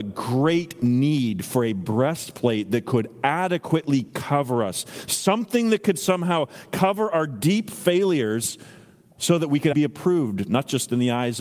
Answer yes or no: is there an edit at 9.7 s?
yes